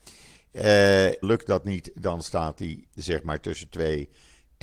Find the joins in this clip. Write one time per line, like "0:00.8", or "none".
0:01.2
0:02.9